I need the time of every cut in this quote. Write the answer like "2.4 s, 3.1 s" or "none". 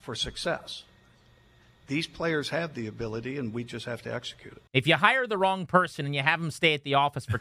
4.7 s